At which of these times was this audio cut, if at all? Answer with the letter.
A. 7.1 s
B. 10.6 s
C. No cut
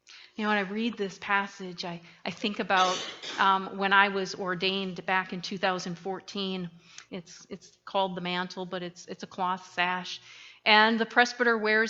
A